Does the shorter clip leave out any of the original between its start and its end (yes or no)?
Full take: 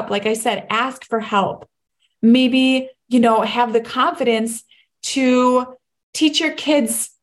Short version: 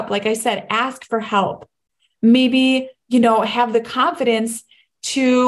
no